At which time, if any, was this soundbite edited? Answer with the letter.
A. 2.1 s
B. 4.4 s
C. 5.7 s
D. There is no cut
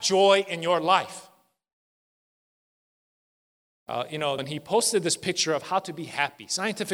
B